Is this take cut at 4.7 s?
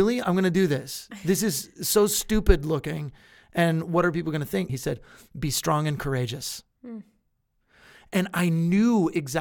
yes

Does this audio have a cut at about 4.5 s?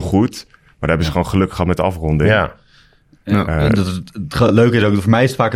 no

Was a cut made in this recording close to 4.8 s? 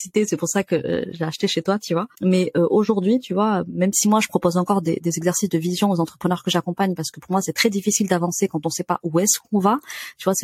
no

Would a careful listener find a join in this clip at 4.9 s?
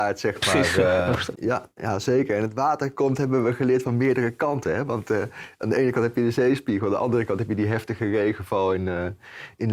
no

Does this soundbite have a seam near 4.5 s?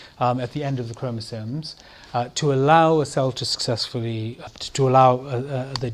yes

